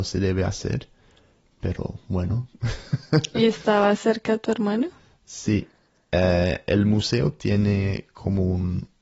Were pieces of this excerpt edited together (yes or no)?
no